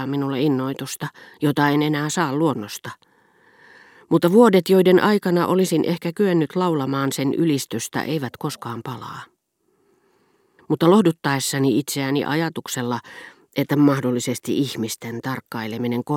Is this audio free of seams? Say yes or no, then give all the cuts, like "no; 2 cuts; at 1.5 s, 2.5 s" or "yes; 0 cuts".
yes; 0 cuts